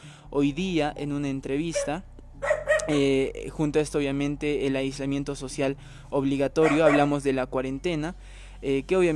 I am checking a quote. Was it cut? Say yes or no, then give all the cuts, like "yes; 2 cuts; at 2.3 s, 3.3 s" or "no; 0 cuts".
no; 0 cuts